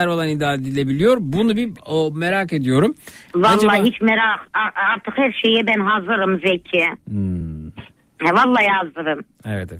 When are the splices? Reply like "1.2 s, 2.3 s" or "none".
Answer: none